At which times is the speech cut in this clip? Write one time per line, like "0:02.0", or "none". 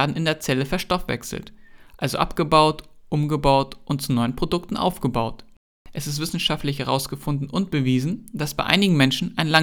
none